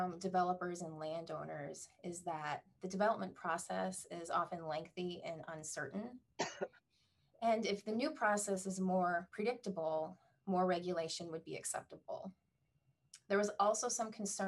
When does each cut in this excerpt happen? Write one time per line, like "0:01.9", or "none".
none